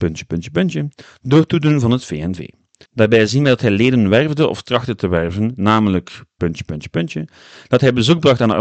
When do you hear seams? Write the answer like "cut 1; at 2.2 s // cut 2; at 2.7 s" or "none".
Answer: cut 1; at 2.9 s